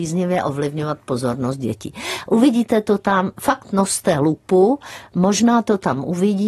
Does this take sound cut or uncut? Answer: uncut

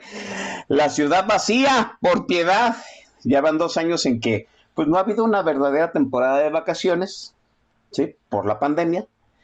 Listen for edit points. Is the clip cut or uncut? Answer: uncut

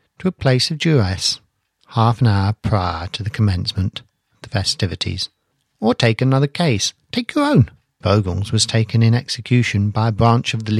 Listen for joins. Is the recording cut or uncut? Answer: cut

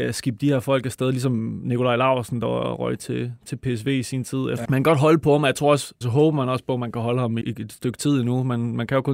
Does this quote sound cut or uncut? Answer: cut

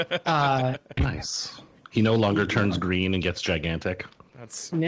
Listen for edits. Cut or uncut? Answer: cut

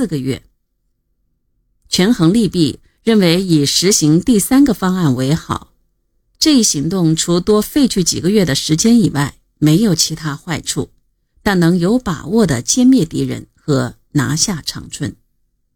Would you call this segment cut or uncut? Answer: uncut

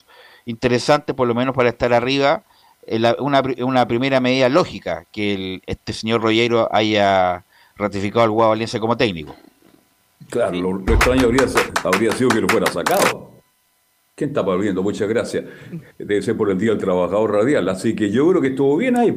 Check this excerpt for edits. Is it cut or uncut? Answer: uncut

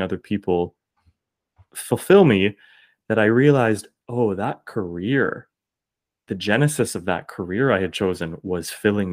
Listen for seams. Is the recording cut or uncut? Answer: uncut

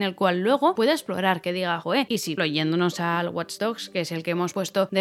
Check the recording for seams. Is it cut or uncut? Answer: cut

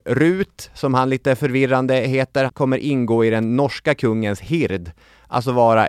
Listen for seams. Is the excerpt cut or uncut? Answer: cut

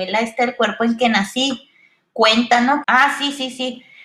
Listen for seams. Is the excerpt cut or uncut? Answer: cut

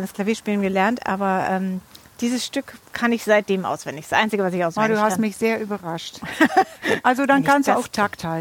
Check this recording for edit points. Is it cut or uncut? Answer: uncut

